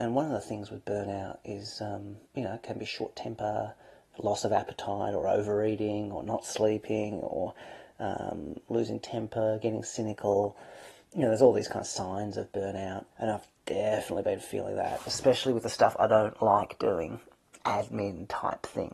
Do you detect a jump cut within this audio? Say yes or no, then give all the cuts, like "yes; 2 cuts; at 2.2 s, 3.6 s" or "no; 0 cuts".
yes; 2 cuts; at 2.2 s, 13.1 s